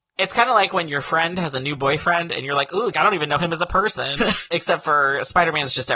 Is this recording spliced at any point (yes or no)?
yes